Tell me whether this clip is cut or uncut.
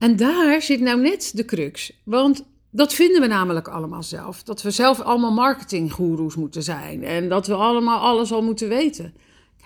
uncut